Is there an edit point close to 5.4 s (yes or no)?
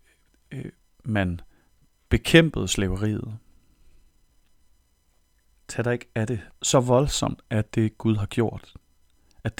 no